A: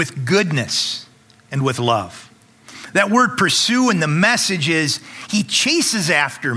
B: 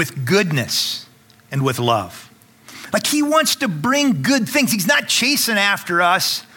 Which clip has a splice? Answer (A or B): B